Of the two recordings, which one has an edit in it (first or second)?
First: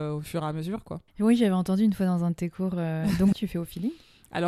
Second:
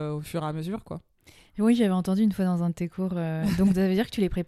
first